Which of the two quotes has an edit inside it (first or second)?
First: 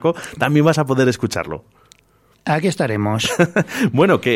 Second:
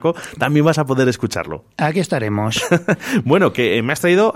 second